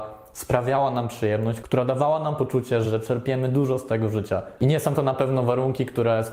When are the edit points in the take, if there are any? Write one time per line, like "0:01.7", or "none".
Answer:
0:01.6
0:02.8
0:04.6